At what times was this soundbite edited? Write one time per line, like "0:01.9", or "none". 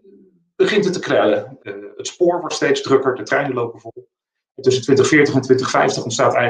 0:01.6